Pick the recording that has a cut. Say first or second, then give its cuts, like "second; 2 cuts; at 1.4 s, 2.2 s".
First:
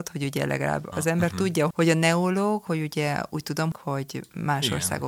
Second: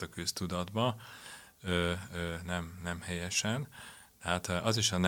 first; 2 cuts; at 1.7 s, 3.7 s